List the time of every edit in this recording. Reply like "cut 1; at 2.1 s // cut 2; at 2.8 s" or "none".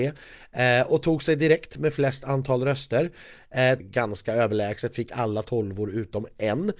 cut 1; at 3.8 s

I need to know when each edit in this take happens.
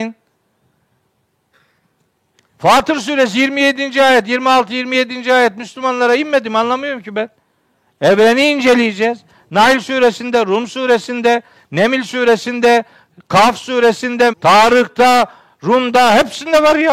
cut 1; at 14.3 s

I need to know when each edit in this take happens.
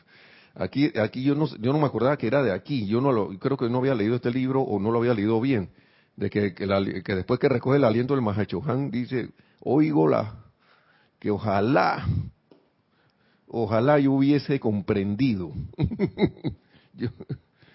none

